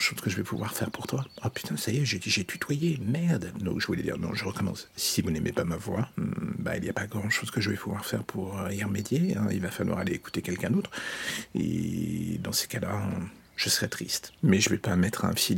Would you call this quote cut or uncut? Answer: uncut